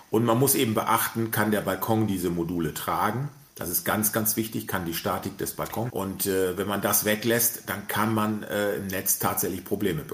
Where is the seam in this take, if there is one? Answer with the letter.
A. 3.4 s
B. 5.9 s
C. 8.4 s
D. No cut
B